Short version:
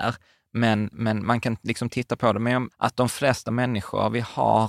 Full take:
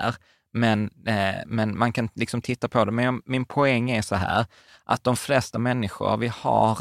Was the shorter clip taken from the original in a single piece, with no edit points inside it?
no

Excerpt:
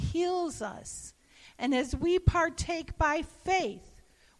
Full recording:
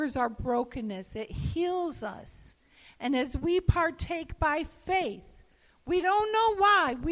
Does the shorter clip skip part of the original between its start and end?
no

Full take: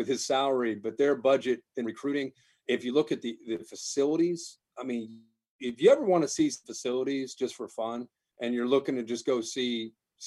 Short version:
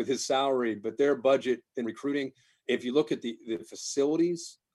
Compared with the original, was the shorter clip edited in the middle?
no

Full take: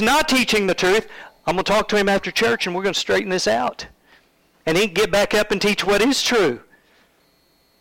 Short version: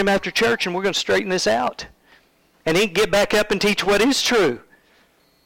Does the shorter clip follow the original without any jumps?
yes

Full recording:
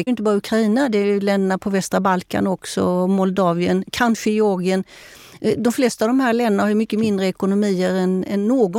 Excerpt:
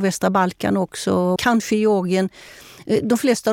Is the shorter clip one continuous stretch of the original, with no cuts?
no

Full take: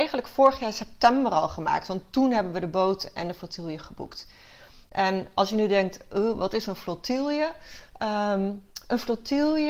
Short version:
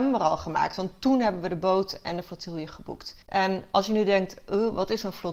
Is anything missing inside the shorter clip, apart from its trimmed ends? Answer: yes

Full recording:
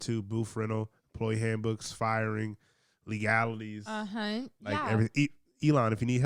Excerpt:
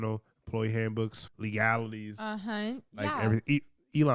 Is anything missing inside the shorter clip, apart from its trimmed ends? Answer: yes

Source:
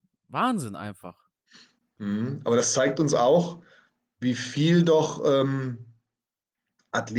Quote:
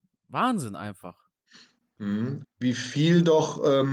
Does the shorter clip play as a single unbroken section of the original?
no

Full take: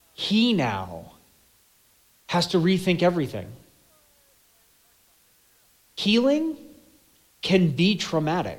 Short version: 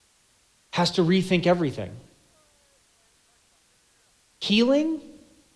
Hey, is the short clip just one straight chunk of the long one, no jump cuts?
yes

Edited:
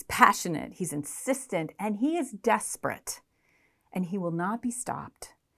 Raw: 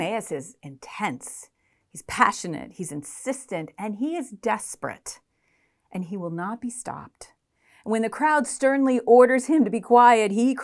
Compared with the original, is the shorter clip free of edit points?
yes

